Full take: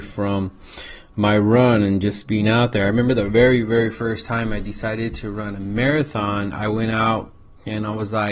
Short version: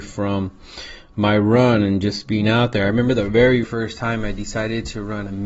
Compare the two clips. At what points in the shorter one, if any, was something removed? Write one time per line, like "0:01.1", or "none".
0:03.6